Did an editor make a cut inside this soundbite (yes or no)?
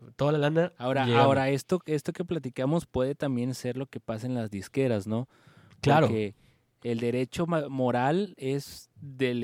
no